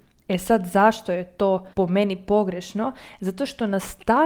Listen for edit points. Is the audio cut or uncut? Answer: cut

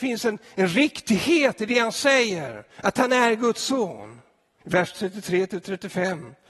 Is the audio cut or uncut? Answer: cut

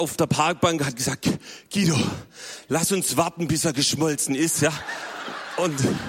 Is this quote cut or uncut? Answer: uncut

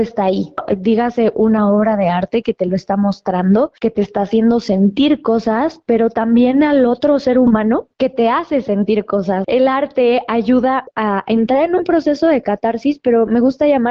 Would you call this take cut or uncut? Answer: uncut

